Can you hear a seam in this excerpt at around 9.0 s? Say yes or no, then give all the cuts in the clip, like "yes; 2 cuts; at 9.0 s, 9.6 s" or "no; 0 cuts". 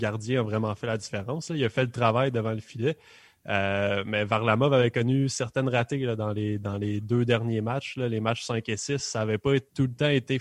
no; 0 cuts